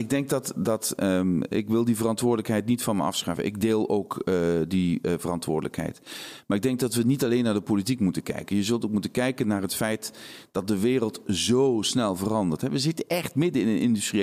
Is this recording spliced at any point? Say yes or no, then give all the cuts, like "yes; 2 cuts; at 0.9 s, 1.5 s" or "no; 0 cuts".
no; 0 cuts